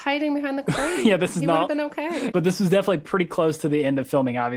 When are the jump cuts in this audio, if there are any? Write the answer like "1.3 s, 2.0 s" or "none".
2.3 s